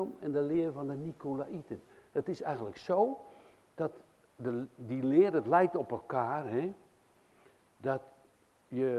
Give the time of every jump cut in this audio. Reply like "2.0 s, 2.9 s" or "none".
none